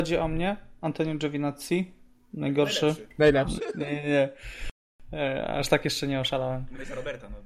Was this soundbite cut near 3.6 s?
yes; 1 cut; at 3.6 s

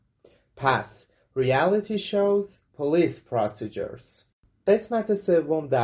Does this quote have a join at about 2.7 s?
yes; 1 cut; at 2.7 s

